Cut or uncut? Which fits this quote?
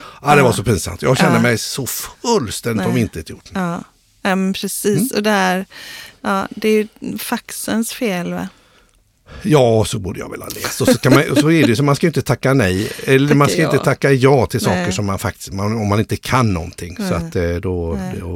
uncut